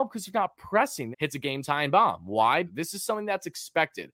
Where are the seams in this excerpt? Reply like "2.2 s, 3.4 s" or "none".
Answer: 1.1 s, 2.6 s